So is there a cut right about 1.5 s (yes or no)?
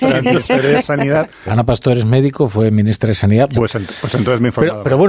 yes